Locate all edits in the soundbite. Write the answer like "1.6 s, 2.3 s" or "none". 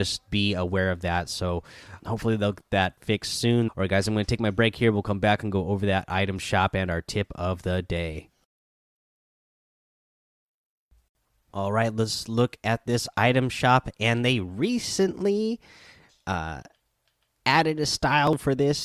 2.0 s, 3.7 s